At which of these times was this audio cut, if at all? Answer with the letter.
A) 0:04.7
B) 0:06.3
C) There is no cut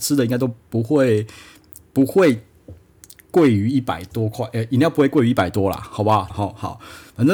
B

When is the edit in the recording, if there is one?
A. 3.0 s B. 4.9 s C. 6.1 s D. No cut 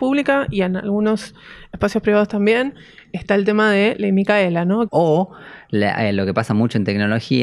B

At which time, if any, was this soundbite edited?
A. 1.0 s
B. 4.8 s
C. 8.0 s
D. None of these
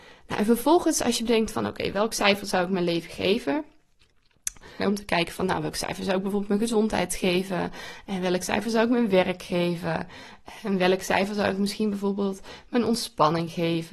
B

